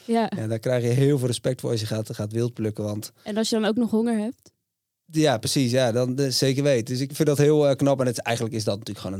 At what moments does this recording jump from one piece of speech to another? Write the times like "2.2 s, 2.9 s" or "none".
7.1 s